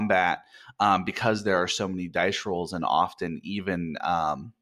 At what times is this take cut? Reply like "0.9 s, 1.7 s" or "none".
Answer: none